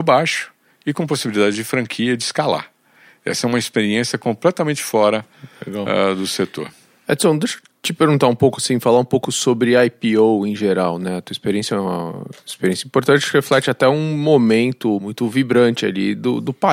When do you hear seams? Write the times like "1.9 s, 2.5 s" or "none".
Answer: none